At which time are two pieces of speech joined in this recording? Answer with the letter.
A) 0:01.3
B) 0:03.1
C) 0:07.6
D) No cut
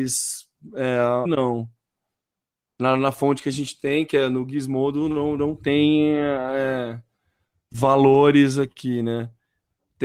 A